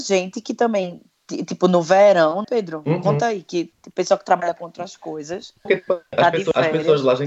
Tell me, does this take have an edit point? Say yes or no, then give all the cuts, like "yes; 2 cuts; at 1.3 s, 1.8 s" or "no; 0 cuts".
yes; 1 cut; at 2.4 s